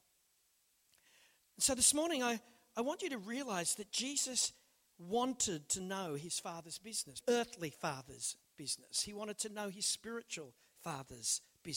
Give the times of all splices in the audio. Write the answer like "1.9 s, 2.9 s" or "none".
1.4 s, 7.2 s